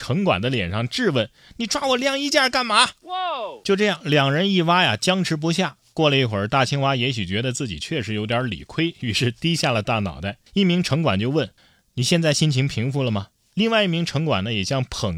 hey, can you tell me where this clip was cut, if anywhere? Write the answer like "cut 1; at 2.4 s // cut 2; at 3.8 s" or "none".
cut 1; at 10.5 s // cut 2; at 11.6 s